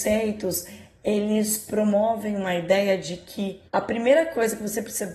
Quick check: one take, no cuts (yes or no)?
no